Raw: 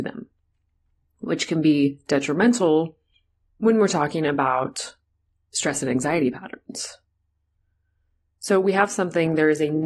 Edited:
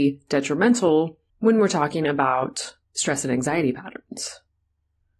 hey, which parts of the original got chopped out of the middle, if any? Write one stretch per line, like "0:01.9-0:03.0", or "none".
0:03.1-0:03.5
0:05.0-0:05.4